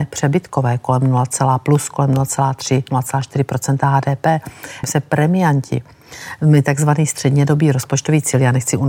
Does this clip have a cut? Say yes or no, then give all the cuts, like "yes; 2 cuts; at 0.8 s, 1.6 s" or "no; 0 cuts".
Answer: yes; 1 cut; at 4.8 s